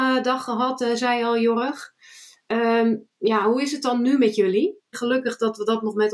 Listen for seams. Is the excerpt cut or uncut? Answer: cut